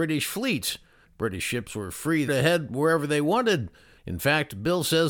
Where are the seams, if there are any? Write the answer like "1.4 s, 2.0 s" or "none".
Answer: 1.0 s, 2.3 s, 4.0 s